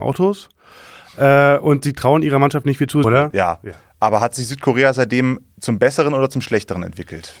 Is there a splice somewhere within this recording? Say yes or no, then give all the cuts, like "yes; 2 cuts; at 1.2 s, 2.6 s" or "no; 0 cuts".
yes; 1 cut; at 3.0 s